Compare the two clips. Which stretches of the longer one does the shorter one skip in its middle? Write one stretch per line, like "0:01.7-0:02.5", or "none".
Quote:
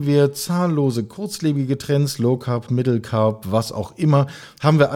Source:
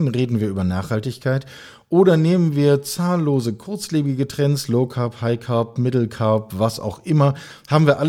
0:05.2-0:05.7

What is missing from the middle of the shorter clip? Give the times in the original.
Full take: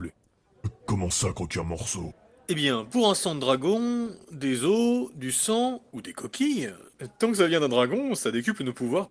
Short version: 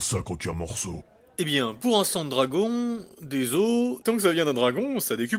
0:05.1-0:07.2

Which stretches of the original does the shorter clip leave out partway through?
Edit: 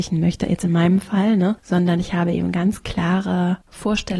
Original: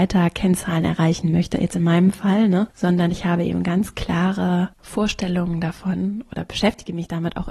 none

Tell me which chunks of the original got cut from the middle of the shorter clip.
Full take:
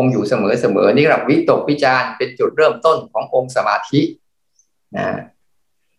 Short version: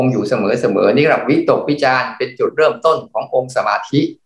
none

